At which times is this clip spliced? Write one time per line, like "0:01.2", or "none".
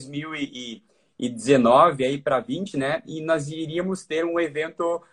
0:02.7